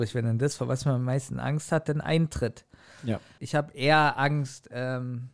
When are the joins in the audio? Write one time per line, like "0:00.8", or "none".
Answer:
0:03.4